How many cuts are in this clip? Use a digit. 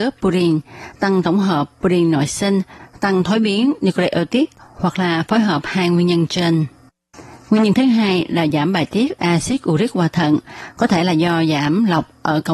0